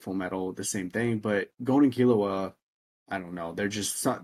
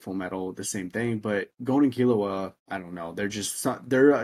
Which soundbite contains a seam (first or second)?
second